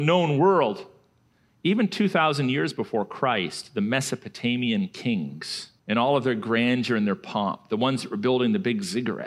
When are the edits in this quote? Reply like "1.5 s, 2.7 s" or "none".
1.5 s, 5.8 s